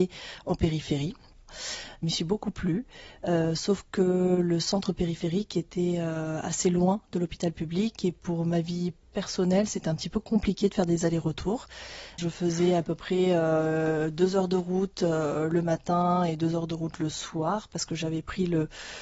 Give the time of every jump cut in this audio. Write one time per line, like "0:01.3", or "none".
0:01.5